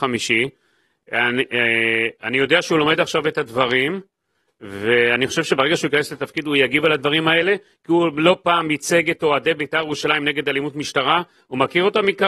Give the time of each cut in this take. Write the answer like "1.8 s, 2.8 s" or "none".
none